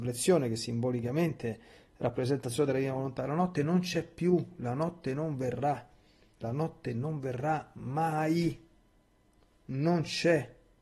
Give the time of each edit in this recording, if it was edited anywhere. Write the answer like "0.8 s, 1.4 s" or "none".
6.4 s